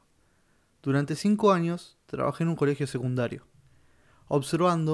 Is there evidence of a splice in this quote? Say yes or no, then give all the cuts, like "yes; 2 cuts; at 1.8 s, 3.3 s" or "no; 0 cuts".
no; 0 cuts